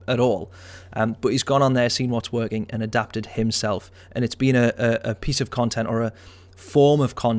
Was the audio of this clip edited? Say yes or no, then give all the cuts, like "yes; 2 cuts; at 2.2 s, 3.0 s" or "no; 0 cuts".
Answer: no; 0 cuts